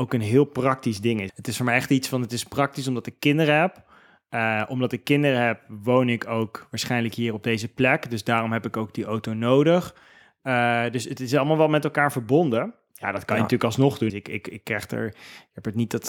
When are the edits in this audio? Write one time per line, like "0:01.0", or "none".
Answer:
0:01.3
0:12.9
0:14.1